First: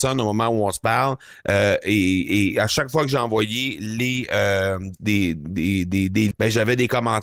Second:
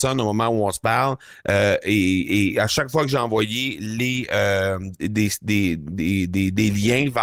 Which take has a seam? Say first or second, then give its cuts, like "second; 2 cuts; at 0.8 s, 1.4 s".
first; 2 cuts; at 5.0 s, 6.3 s